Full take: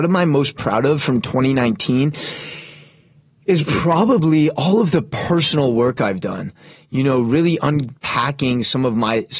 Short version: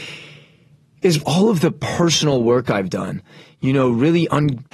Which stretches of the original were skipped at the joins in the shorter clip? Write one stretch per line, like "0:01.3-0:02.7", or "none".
0:03.7-0:04.5